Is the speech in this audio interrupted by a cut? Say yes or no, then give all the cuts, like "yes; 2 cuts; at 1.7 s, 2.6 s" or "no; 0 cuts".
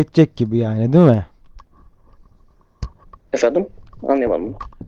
yes; 1 cut; at 3.3 s